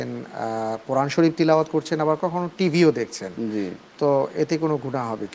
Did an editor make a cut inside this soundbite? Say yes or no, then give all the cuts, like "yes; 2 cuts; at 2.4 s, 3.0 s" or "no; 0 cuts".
yes; 1 cut; at 2.2 s